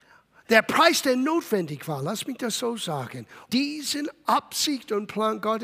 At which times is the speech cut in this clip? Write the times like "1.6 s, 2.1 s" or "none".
3.5 s